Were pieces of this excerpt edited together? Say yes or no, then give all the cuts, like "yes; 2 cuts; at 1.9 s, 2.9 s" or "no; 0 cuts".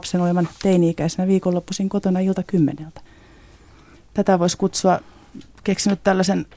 no; 0 cuts